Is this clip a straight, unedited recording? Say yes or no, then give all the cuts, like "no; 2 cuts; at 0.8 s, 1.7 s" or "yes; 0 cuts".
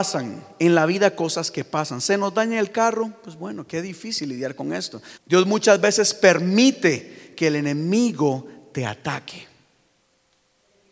no; 1 cut; at 5.2 s